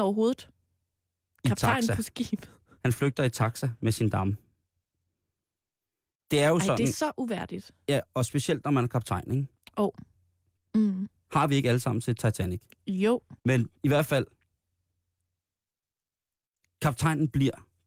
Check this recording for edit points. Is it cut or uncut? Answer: cut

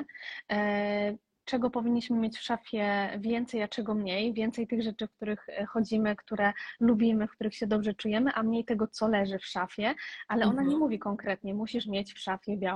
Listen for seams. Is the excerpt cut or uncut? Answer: uncut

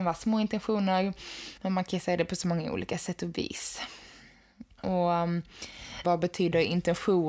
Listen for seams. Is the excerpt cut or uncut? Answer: cut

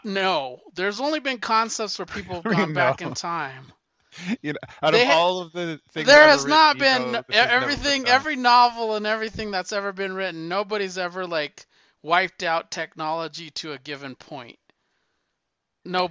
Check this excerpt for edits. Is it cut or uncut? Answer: uncut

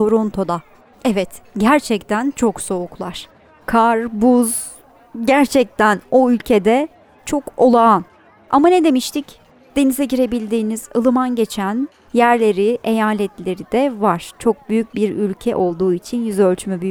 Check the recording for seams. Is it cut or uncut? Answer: uncut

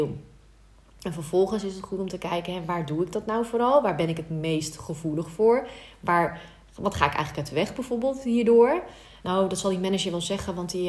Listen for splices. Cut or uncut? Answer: cut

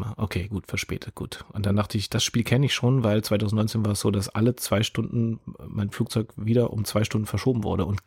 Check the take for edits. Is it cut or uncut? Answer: uncut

